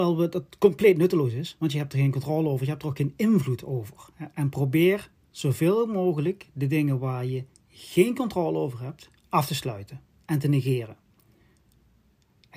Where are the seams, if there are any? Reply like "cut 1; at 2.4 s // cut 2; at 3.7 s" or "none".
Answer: cut 1; at 4.3 s // cut 2; at 9.1 s

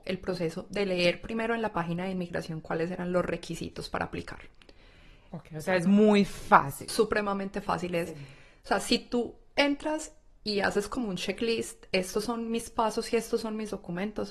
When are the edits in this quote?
cut 1; at 5.3 s

